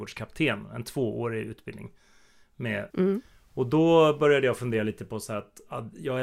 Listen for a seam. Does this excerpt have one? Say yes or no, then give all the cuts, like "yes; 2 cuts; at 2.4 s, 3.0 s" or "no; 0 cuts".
yes; 1 cut; at 2.9 s